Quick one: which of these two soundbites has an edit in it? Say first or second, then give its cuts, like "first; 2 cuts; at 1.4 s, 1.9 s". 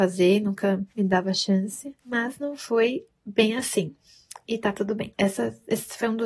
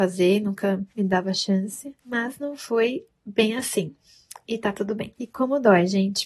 first; 1 cut; at 5.1 s